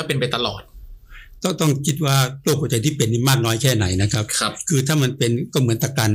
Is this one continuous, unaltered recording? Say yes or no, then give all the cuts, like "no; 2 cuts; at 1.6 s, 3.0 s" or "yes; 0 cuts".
yes; 0 cuts